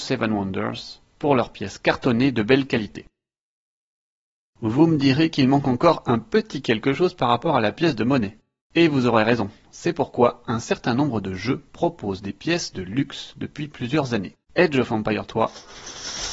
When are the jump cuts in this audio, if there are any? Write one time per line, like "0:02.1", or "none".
0:08.6
0:14.4